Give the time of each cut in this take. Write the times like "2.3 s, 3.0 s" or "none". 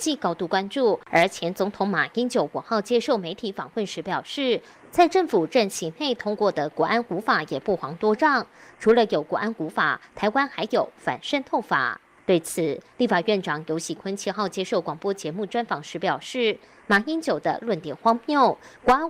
none